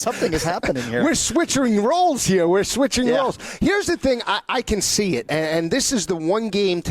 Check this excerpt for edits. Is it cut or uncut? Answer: uncut